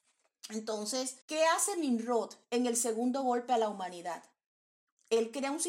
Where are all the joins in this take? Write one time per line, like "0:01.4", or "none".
0:01.2